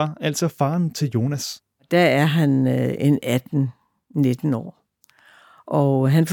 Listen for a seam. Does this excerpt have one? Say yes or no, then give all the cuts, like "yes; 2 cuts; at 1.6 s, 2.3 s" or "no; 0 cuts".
no; 0 cuts